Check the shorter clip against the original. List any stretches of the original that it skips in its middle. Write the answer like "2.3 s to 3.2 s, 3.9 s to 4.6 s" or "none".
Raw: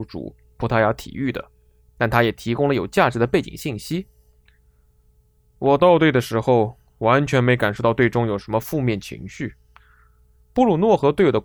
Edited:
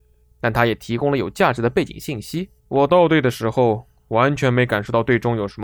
4.1 s to 5.5 s